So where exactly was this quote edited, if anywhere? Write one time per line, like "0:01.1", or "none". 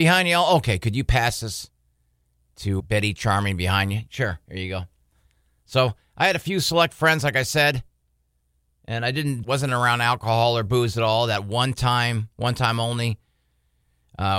0:02.8
0:09.4